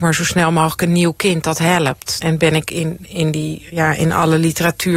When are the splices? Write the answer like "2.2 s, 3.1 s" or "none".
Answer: 2.2 s, 3.7 s

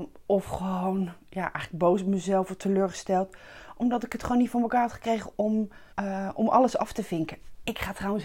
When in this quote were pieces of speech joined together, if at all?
5.9 s

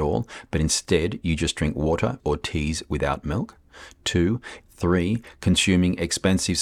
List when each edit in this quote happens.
2.2 s, 4.6 s

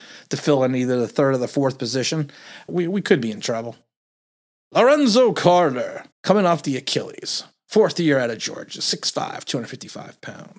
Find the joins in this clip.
2.7 s, 6.1 s

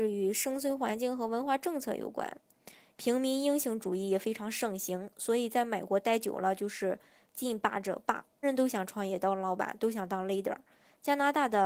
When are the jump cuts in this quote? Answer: 2.9 s, 8.4 s

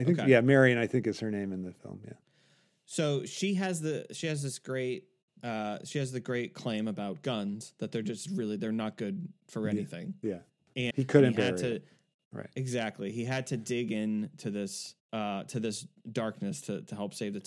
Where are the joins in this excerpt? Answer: 10.9 s, 15.0 s

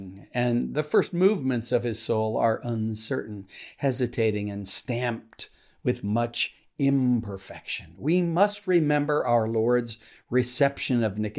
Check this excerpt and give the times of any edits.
none

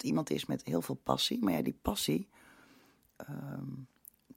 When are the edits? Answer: none

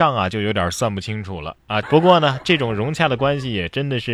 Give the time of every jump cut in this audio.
1.8 s

